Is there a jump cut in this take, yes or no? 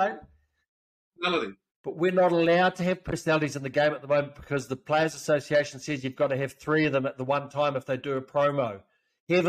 yes